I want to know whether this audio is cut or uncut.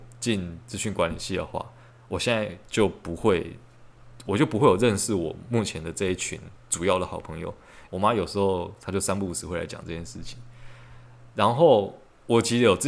cut